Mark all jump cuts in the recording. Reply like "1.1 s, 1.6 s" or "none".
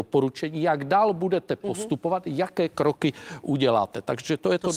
none